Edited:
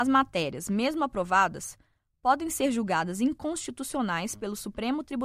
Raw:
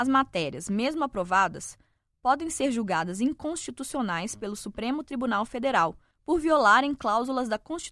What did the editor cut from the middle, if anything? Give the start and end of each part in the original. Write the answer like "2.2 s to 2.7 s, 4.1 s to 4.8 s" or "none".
none